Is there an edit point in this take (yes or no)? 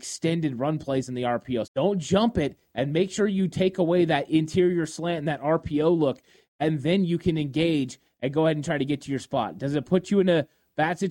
yes